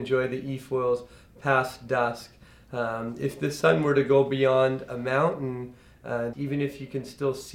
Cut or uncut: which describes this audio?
cut